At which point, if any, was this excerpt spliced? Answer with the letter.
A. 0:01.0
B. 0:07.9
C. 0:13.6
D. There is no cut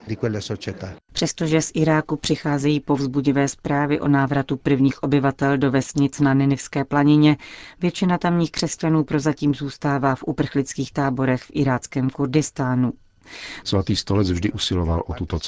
C